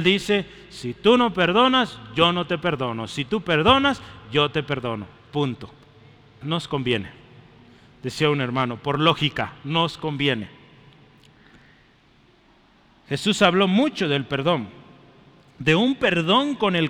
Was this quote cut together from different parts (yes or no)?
yes